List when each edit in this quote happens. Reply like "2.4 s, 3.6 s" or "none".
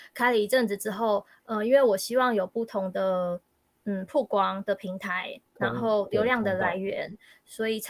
none